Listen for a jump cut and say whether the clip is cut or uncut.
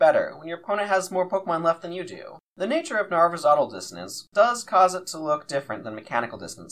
cut